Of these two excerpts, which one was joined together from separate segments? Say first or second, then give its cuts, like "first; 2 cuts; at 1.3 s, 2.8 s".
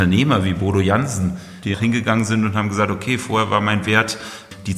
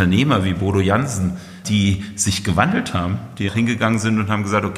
first; 1 cut; at 1.6 s